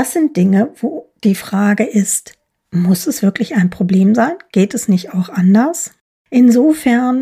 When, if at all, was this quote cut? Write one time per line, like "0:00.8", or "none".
none